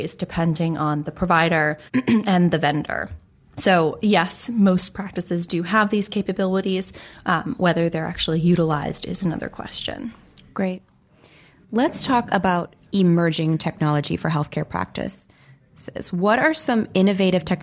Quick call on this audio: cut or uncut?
cut